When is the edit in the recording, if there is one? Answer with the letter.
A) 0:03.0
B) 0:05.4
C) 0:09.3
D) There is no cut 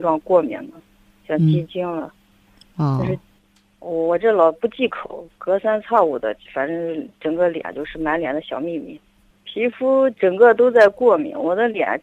C